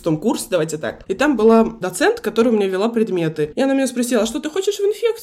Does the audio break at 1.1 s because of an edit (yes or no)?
yes